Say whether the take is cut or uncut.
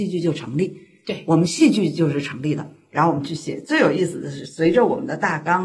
uncut